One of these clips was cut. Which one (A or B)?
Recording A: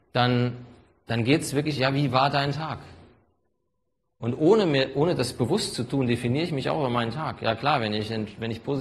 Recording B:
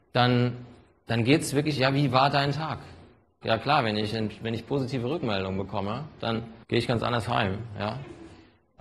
B